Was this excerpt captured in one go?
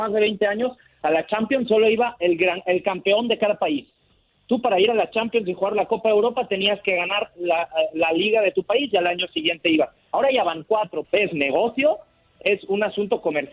no; 1 cut; at 11.0 s

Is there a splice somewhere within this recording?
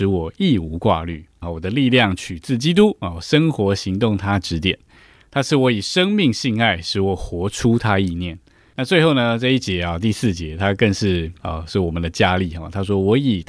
yes; 1 cut; at 1.4 s

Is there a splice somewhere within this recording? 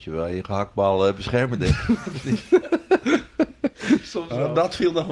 no; 0 cuts

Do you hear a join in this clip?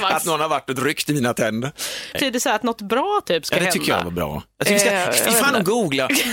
yes; 1 cut; at 2.1 s

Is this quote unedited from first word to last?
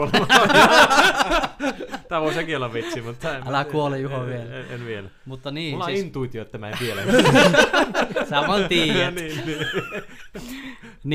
yes; 0 cuts

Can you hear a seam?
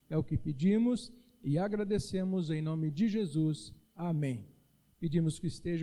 yes; 1 cut; at 4.9 s

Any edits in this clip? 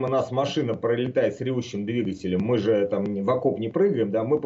no; 0 cuts

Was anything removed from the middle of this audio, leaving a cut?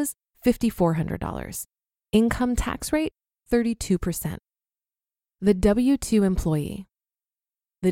no; 0 cuts

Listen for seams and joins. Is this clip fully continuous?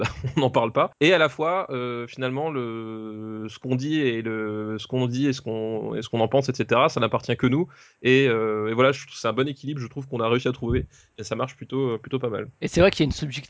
yes; 0 cuts

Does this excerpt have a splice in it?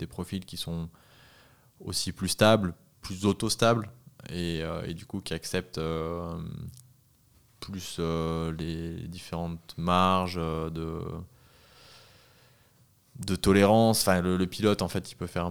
no; 0 cuts

